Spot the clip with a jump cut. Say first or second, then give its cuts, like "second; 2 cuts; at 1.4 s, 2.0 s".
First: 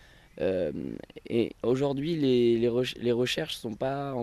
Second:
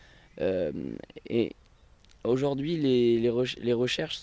first; 1 cut; at 1.6 s